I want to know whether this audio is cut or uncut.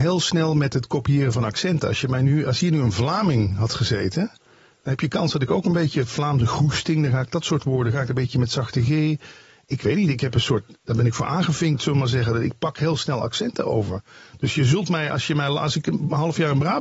uncut